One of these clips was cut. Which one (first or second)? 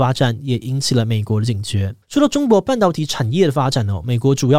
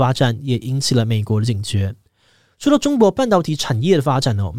first